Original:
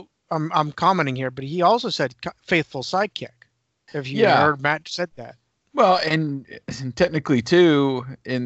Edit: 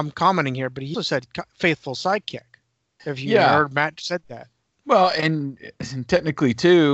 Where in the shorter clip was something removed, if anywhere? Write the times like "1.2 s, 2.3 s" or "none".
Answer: 0.9 s